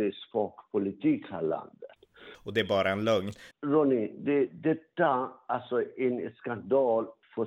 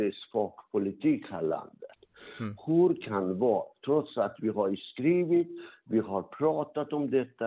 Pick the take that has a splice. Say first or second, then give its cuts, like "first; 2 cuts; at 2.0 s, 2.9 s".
first; 2 cuts; at 2.3 s, 3.5 s